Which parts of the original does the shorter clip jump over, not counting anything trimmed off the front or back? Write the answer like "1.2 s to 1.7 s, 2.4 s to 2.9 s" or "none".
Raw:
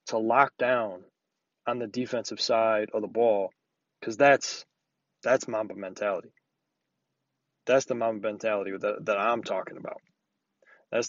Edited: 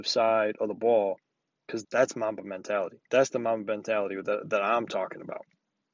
4.2 s to 5.2 s, 6.4 s to 7.6 s